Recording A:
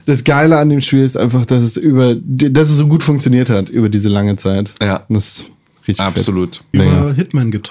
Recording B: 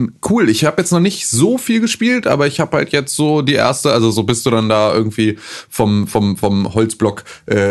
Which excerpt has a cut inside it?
A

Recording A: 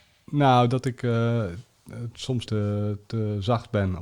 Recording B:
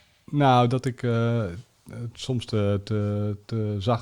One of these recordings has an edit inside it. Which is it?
A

